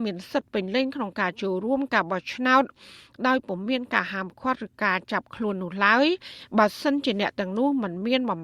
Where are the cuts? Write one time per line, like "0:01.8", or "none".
none